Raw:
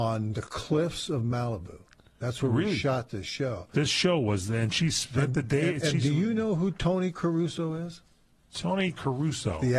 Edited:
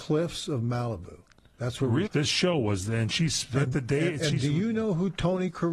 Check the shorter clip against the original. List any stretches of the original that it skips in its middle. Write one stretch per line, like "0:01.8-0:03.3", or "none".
0:02.7-0:03.7